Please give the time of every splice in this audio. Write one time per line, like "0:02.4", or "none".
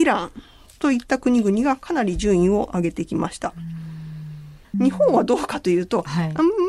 0:04.7